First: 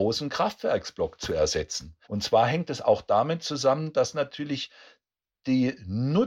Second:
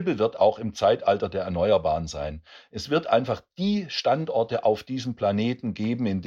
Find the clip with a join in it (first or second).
first